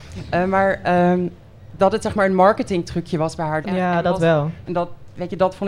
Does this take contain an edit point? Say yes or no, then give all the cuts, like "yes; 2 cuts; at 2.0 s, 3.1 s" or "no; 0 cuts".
yes; 3 cuts; at 1.8 s, 3.6 s, 4.6 s